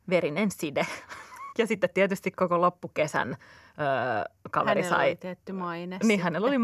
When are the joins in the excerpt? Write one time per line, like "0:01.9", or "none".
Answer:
0:01.5